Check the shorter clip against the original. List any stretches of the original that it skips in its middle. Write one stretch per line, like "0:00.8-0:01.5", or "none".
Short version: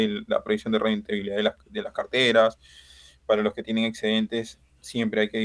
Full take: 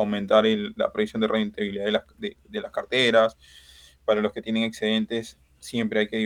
0:02.1-0:02.4